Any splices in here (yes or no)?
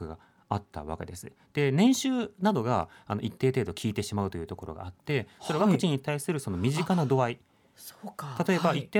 no